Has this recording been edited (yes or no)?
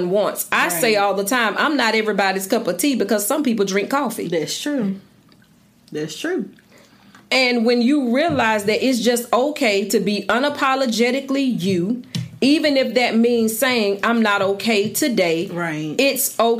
no